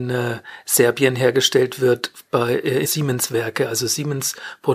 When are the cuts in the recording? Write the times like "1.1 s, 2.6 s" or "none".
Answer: 2.8 s